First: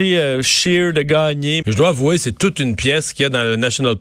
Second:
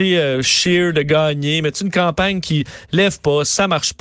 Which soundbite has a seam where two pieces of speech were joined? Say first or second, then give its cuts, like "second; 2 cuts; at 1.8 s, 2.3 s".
first; 1 cut; at 1.6 s